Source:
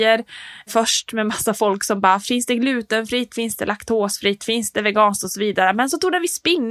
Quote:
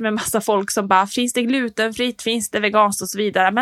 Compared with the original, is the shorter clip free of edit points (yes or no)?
no